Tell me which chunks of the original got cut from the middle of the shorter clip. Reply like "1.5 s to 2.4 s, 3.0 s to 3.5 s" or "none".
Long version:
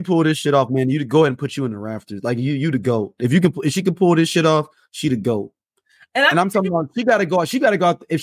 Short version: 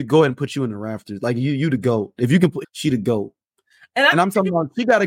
3.6 s to 4.8 s